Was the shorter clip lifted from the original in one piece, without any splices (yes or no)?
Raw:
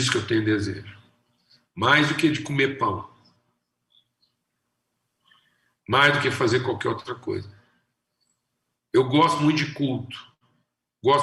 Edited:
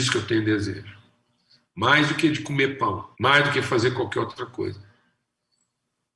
no